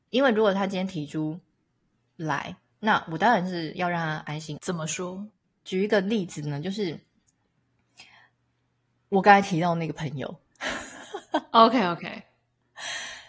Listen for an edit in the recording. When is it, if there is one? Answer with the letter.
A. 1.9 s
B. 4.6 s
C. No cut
B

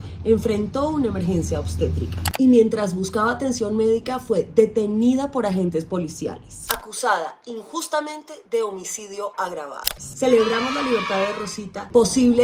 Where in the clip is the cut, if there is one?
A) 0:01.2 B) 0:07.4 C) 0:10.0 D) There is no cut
C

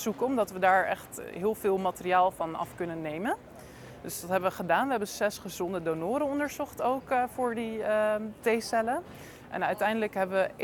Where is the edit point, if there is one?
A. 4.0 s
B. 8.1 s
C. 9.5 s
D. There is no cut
D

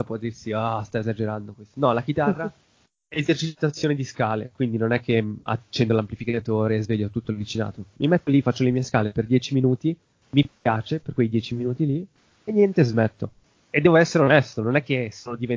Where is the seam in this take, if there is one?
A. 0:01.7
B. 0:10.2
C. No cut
B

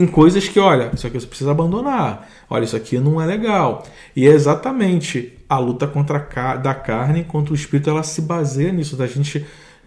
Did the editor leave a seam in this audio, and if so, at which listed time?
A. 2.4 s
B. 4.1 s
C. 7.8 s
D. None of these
D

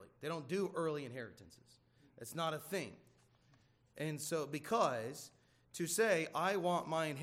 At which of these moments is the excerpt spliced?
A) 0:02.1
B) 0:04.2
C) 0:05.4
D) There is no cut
D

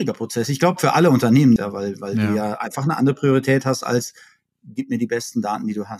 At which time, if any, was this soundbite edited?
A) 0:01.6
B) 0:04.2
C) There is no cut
A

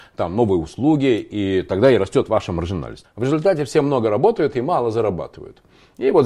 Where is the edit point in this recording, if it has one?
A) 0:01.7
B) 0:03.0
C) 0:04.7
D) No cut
B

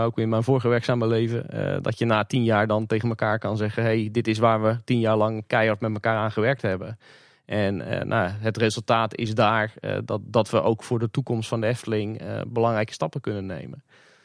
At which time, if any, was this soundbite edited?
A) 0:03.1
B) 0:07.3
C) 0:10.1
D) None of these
D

